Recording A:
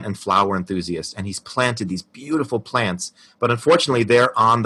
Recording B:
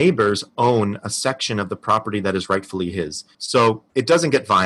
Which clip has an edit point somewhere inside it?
B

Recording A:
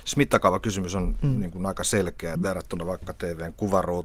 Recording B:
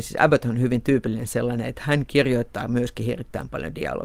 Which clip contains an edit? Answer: A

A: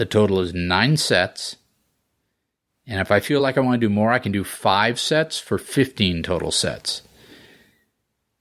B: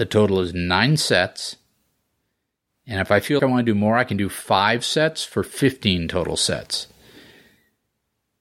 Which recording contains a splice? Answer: B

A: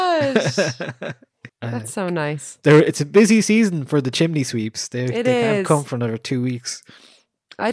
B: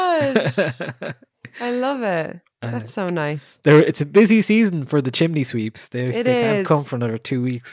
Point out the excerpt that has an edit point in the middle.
A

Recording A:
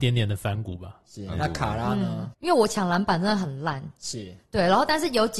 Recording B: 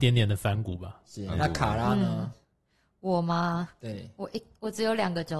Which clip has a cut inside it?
A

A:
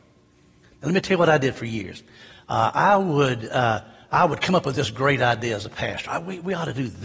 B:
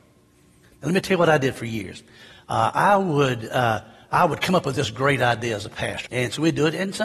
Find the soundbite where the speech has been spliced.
B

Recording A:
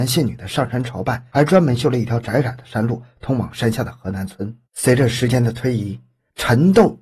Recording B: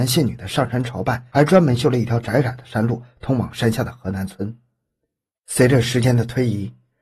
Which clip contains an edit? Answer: A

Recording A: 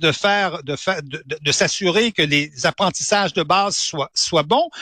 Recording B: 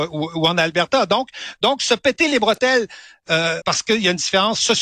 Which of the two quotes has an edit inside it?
B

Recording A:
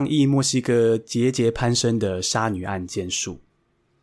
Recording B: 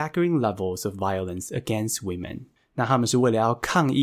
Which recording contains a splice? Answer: B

